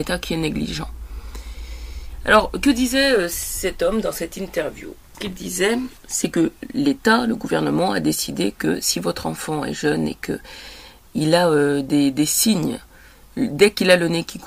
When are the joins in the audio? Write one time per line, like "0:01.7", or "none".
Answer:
none